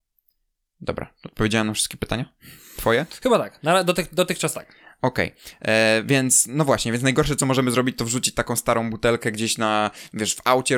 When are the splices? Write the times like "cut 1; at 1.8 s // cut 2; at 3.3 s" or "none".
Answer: none